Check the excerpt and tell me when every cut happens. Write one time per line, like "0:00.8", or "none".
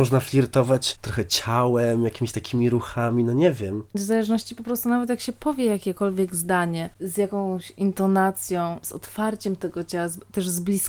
0:03.9
0:08.8